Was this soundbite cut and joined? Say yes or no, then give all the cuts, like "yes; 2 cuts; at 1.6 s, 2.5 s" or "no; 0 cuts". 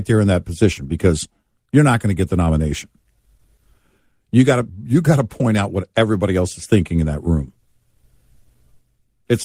no; 0 cuts